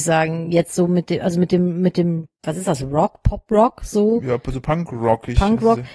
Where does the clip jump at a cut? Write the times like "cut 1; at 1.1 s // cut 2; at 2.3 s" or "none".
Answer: none

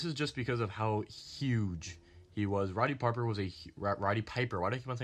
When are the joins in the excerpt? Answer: none

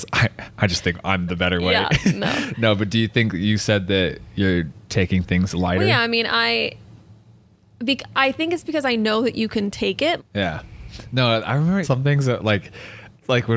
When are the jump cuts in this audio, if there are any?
cut 1; at 10.2 s // cut 2; at 11.8 s

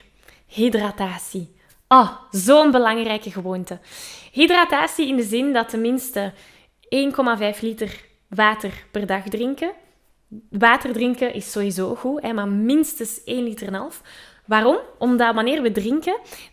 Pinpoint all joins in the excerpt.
none

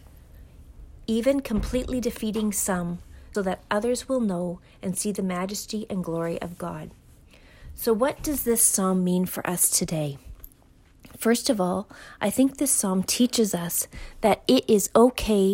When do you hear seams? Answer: cut 1; at 3.3 s

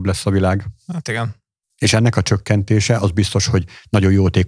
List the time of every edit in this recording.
cut 1; at 1.6 s

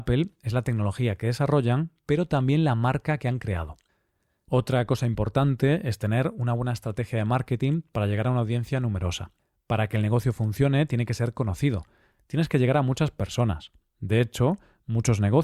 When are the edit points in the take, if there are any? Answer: none

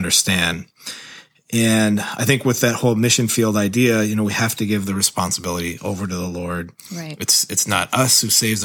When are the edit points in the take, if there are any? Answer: none

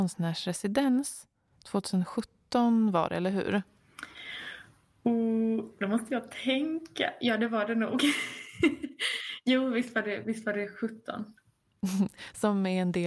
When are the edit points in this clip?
none

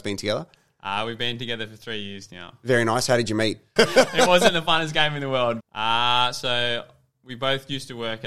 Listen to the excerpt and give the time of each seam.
cut 1; at 3.8 s // cut 2; at 5.6 s

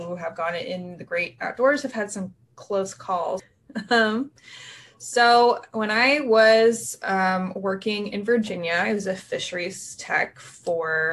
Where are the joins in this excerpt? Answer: cut 1; at 3.4 s

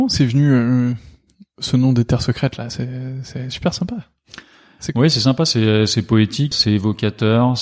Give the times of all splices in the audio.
cut 1; at 6.5 s

